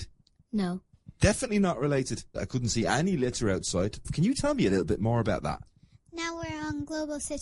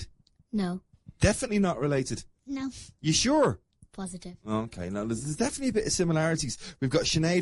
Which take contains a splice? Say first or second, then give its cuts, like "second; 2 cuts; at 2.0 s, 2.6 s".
first; 2 cuts; at 2.3 s, 4.0 s